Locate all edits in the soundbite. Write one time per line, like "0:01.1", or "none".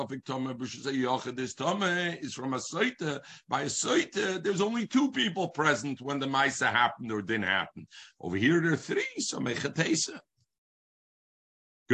none